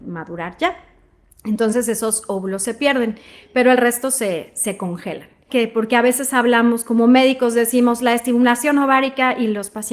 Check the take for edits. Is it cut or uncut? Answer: cut